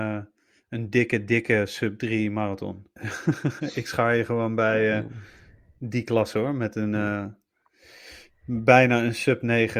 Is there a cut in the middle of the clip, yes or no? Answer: yes